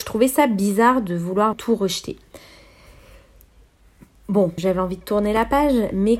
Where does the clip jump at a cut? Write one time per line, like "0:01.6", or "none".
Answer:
0:01.5
0:04.6